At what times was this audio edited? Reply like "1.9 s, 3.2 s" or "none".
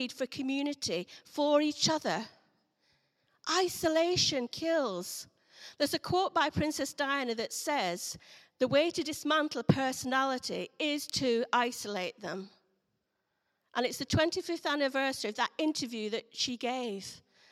none